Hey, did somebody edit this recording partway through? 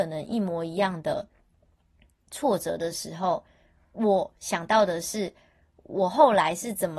no; 0 cuts

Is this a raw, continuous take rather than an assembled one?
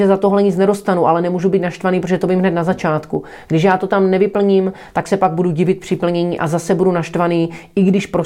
yes; 0 cuts

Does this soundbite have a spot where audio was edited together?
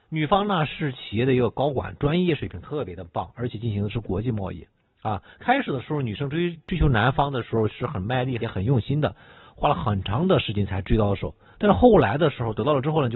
yes; 1 cut; at 8.4 s

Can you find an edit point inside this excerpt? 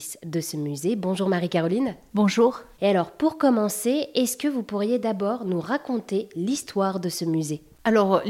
yes; 1 cut; at 2.8 s

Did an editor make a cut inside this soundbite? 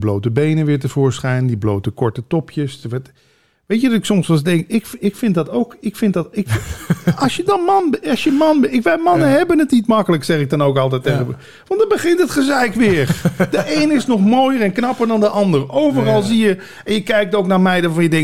no; 0 cuts

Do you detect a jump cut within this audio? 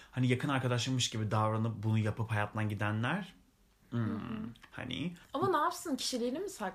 yes; 1 cut; at 5.2 s

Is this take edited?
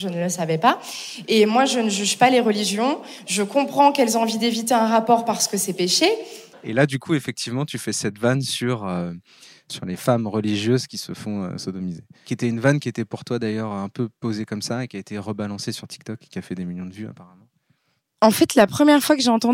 yes; 1 cut; at 6.5 s

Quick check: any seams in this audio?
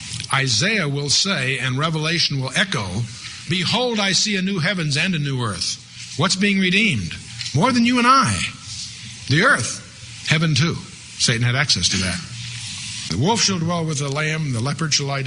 no; 0 cuts

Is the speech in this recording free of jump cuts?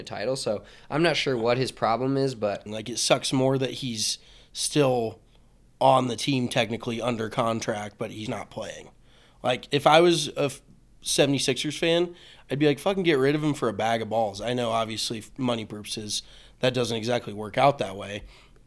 no; 2 cuts; at 2.7 s, 8.3 s

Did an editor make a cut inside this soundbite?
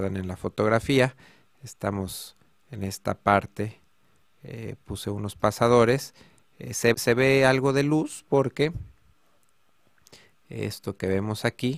yes; 2 cuts; at 4.2 s, 6.9 s

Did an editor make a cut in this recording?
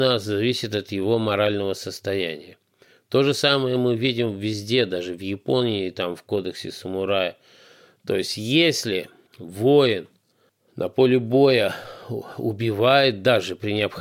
no; 0 cuts

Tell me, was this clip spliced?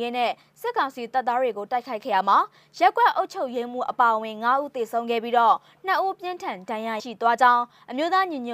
yes; 1 cut; at 7.0 s

